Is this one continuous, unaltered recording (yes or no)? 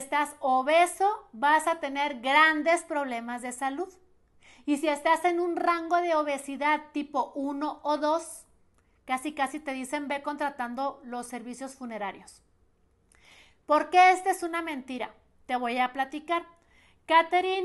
yes